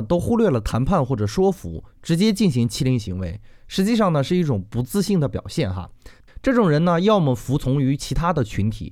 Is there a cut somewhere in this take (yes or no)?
yes